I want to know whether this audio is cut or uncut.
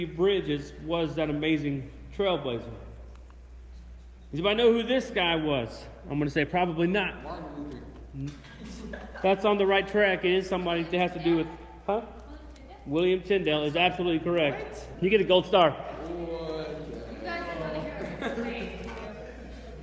cut